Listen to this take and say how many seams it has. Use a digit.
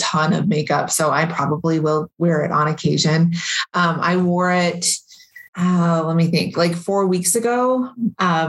1